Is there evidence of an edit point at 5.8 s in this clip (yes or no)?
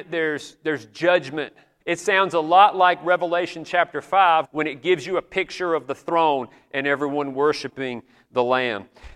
no